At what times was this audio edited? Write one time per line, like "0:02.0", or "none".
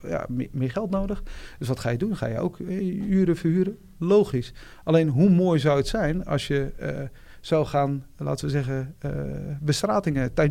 none